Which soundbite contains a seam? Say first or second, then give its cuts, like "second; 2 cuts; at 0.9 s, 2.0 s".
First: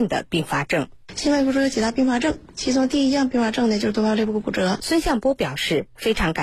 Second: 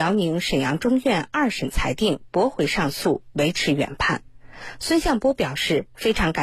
first; 1 cut; at 4.8 s